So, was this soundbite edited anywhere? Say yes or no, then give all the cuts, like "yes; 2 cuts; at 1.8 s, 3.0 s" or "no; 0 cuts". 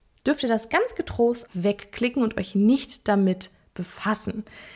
yes; 1 cut; at 1.5 s